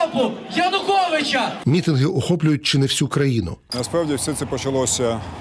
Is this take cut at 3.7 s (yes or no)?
yes